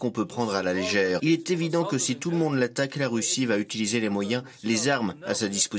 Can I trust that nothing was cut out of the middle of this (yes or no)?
no